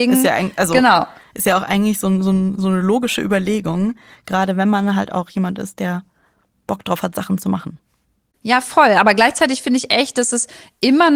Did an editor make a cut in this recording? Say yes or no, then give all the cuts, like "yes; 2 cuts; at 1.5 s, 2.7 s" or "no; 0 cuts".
no; 0 cuts